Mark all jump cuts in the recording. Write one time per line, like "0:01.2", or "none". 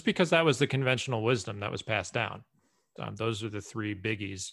0:03.0